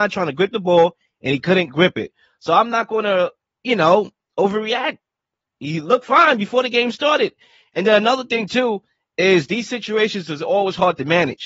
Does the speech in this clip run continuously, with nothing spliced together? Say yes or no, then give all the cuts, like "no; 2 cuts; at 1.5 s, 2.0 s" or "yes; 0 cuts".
yes; 0 cuts